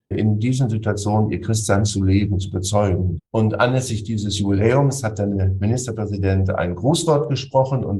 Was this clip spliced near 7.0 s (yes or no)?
no